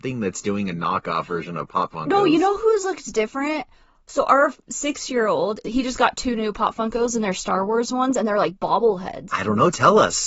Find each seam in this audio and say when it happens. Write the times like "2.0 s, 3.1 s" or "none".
5.6 s, 9.3 s